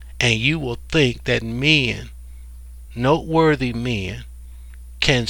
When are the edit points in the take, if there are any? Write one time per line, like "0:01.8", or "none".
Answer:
none